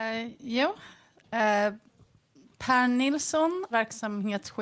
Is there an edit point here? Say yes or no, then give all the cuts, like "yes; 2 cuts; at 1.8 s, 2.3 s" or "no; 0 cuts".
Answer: yes; 1 cut; at 3.7 s